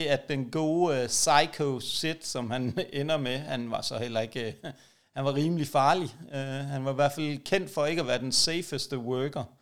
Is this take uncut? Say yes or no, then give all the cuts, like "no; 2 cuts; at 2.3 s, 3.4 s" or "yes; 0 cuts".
yes; 0 cuts